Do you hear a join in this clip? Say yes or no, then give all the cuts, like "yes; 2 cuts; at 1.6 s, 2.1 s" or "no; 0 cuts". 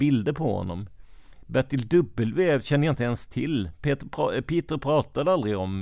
no; 0 cuts